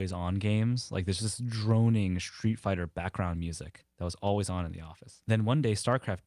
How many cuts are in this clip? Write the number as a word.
zero